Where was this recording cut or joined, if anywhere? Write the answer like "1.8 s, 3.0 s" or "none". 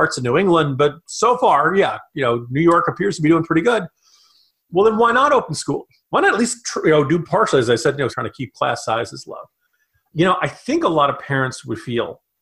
8.1 s